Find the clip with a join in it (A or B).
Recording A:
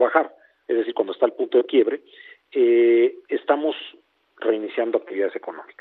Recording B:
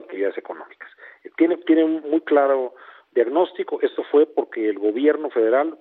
A